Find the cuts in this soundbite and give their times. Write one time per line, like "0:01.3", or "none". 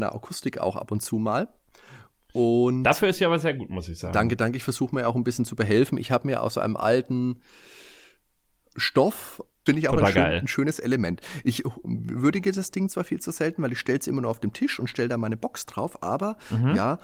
0:09.7